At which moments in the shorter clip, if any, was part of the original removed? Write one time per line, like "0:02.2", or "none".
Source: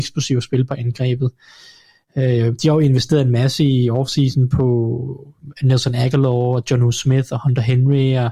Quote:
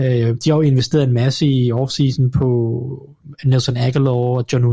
none

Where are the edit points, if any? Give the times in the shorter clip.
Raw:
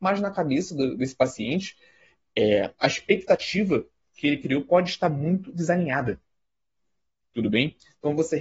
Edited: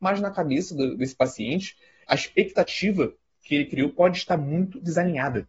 0:02.0

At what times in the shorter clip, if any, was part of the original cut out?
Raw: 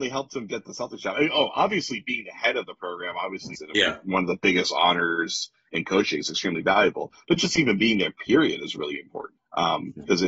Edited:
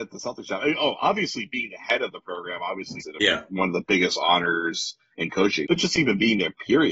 0:05.7

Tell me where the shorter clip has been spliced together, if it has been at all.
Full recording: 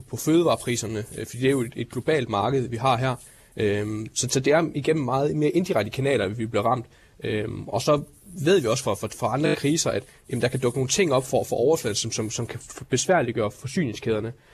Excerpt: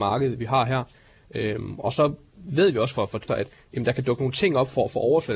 0:01.2
0:03.3

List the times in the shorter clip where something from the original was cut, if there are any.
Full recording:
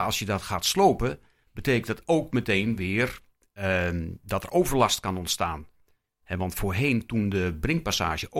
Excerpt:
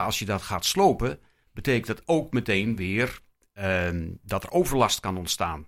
none

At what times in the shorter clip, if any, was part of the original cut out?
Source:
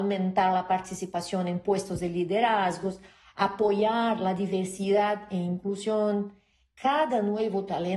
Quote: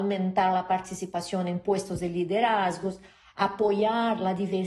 none

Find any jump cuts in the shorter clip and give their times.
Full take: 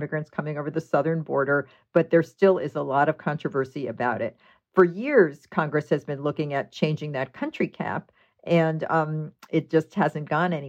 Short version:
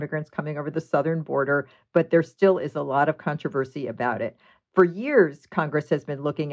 none

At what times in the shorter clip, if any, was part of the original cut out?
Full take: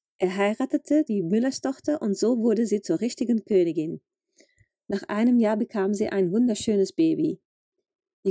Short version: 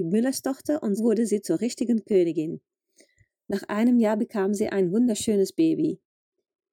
0:01.0

